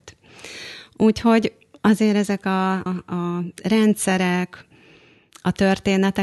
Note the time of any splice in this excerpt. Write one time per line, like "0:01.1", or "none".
0:02.9